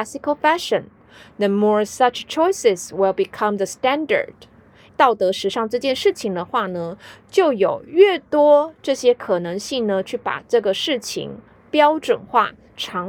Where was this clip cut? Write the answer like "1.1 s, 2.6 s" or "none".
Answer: 4.9 s